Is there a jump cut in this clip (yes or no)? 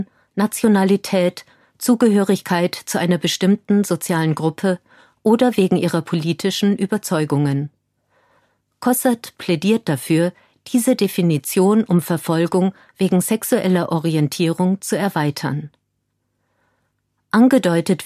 no